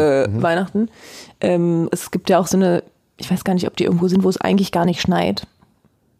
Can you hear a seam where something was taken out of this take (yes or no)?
yes